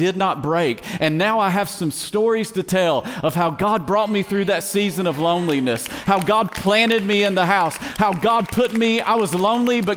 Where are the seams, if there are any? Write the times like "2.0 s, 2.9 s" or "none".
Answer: none